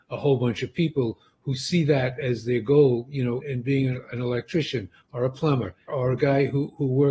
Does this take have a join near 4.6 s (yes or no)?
no